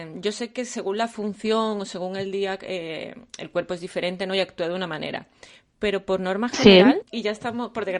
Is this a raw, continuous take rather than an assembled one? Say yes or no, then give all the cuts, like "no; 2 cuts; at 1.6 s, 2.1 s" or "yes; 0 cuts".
no; 1 cut; at 7.0 s